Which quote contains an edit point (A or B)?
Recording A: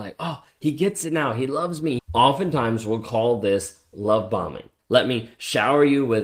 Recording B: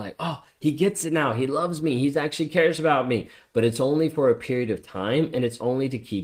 A